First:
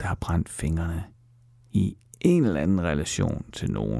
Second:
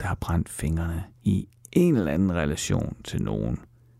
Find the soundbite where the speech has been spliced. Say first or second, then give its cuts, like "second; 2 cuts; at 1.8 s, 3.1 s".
second; 1 cut; at 1.2 s